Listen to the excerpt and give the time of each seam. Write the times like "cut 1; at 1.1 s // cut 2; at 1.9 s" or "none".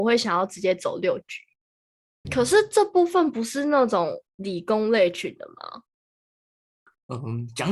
cut 1; at 2.2 s